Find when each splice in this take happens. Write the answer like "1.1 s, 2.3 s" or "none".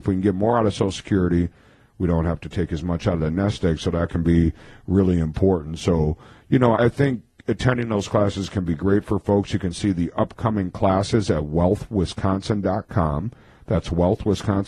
6.8 s